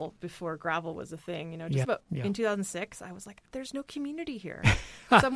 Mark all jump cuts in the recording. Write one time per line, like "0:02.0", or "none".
0:01.8
0:03.4